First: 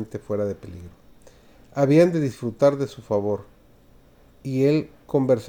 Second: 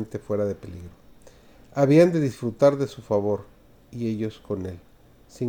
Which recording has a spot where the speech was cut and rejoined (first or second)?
second